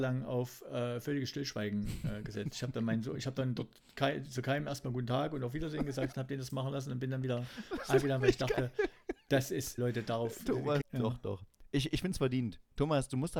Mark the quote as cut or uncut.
cut